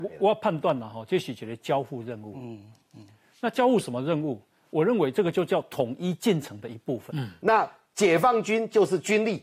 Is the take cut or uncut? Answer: cut